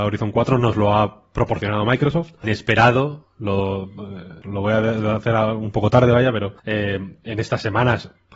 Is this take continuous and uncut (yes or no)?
no